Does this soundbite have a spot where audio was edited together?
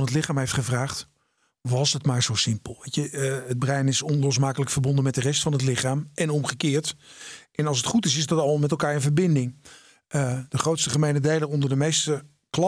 no; 0 cuts

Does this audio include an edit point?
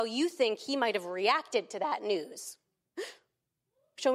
no; 0 cuts

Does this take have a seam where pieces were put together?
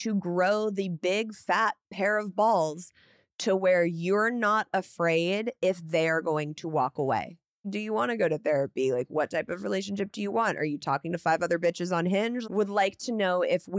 yes; 2 cuts; at 7.6 s, 12.4 s

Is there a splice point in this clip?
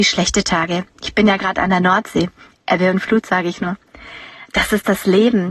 no; 0 cuts

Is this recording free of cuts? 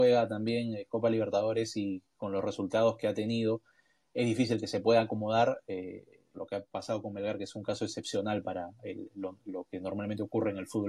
no; 1 cut; at 6.3 s

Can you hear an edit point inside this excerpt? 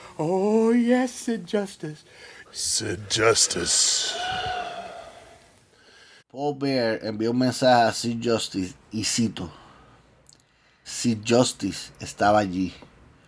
yes; 3 cuts; at 2.4 s, 6.2 s, 10.8 s

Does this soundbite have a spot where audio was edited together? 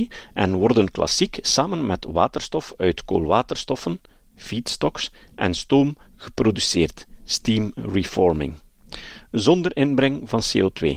no; 0 cuts

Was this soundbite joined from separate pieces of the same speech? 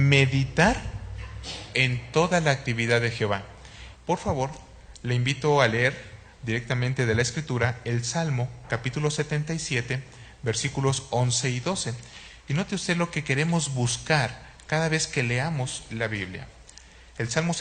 yes; 1 cut; at 3.9 s

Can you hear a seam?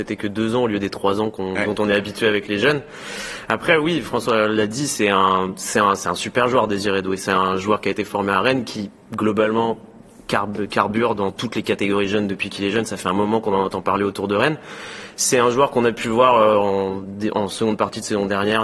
no; 0 cuts

